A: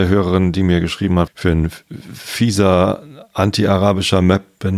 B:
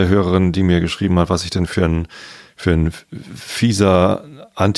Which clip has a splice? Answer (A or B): A